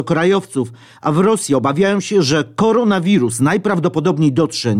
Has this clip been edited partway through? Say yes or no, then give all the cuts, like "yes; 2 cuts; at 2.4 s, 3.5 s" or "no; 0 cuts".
no; 0 cuts